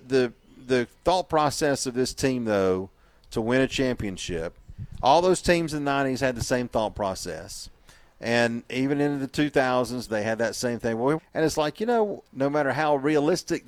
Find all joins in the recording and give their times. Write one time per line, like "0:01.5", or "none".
0:10.1
0:11.2
0:12.2